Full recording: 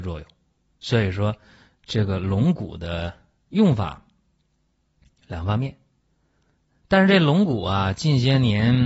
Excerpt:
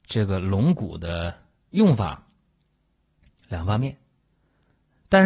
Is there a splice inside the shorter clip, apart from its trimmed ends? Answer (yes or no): no